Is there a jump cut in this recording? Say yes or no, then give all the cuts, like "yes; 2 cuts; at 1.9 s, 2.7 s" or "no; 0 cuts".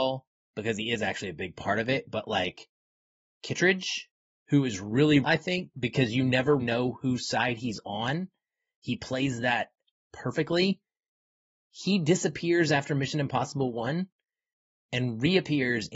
yes; 2 cuts; at 5.2 s, 6.6 s